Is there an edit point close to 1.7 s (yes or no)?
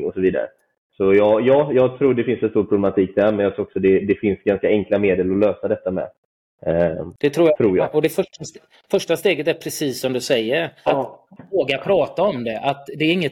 no